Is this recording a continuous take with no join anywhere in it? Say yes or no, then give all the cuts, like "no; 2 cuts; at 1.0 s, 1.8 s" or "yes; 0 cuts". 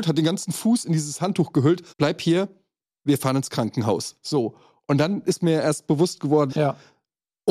no; 2 cuts; at 1.9 s, 6.5 s